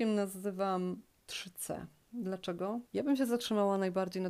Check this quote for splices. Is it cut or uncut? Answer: cut